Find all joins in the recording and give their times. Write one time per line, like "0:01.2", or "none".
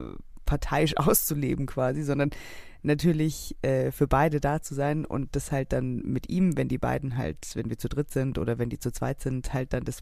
none